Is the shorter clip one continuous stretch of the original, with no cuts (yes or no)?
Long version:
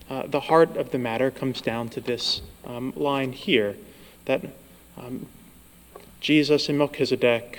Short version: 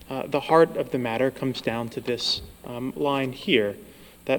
yes